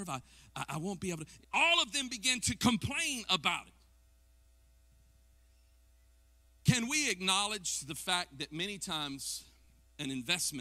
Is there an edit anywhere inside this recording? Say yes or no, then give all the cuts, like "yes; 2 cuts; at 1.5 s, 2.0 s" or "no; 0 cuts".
yes; 1 cut; at 1.4 s